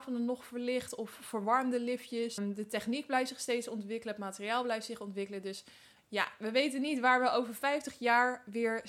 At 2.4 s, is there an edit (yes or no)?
yes